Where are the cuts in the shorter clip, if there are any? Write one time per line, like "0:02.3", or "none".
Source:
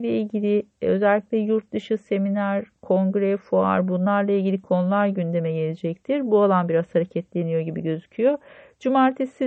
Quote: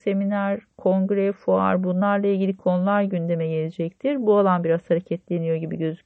none